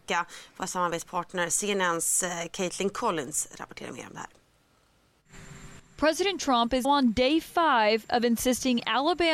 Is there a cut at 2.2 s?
no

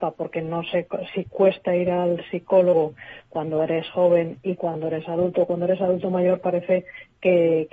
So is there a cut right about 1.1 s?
yes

